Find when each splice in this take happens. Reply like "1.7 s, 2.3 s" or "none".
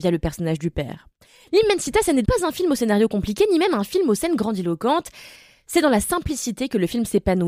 2.2 s